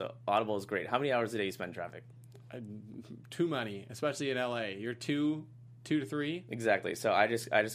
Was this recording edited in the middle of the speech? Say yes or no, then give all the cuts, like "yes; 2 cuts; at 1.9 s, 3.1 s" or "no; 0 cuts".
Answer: no; 0 cuts